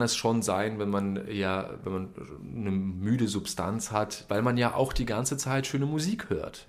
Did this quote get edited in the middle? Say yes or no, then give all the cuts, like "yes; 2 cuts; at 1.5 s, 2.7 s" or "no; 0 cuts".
yes; 1 cut; at 4.3 s